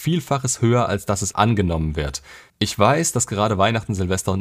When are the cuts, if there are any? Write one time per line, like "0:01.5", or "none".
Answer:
0:01.3
0:02.5